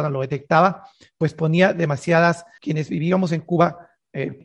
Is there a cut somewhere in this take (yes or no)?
yes